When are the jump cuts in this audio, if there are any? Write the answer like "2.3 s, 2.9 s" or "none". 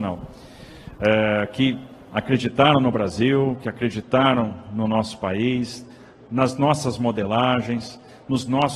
none